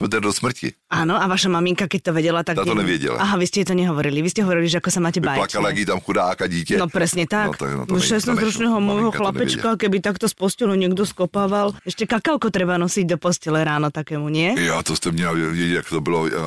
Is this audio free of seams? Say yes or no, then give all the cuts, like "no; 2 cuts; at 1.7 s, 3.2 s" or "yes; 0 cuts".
yes; 0 cuts